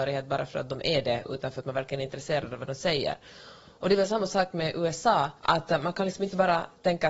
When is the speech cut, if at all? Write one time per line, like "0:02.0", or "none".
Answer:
0:05.4